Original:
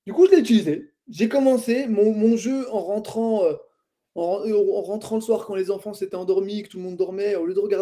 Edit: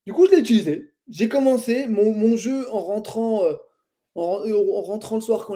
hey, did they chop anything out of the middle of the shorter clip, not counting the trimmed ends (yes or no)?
no